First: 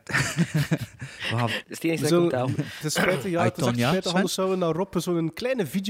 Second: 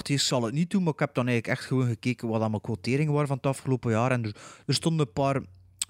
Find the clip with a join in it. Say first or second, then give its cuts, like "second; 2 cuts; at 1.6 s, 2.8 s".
first; 1 cut; at 1.6 s